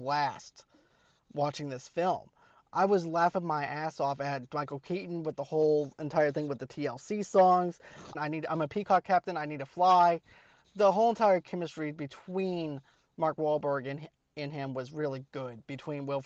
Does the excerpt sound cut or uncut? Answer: cut